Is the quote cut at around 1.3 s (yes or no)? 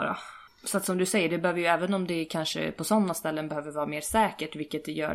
no